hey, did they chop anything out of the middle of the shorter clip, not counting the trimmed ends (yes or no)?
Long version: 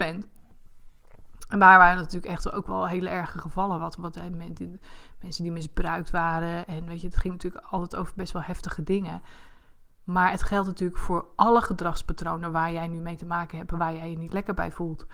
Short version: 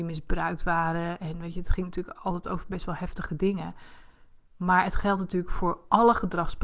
no